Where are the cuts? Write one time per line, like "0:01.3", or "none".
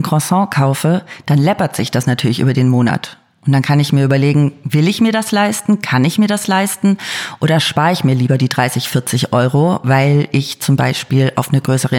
none